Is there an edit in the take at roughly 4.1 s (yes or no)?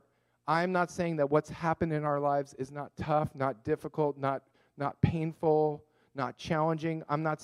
no